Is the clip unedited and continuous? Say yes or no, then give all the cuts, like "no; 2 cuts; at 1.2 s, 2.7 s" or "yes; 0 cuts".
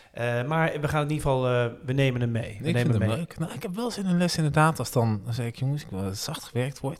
yes; 0 cuts